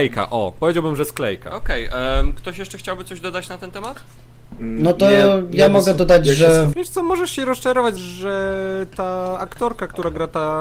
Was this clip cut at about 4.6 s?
no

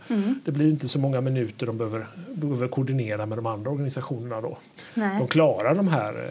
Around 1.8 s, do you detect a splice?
no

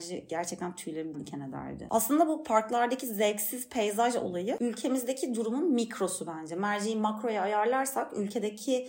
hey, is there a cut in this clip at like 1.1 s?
yes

